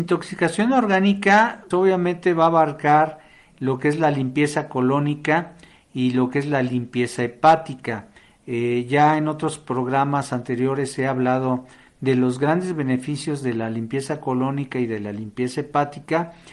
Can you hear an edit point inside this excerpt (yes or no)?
yes